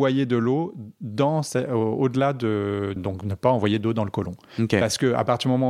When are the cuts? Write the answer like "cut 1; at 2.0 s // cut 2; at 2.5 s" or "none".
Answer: cut 1; at 3.0 s